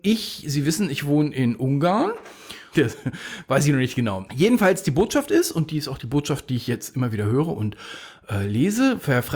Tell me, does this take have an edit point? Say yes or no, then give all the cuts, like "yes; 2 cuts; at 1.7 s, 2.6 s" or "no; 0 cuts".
yes; 2 cuts; at 2.7 s, 4.3 s